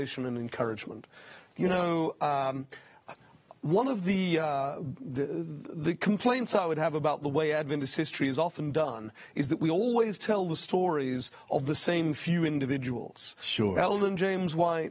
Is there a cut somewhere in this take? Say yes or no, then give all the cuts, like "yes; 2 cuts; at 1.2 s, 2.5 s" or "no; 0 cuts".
no; 0 cuts